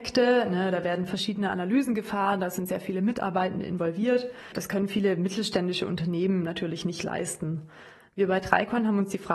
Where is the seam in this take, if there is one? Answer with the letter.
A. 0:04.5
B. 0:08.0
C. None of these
C